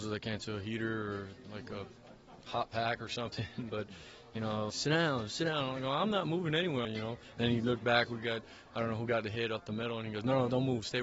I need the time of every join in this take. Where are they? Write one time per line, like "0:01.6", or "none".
0:04.7
0:06.8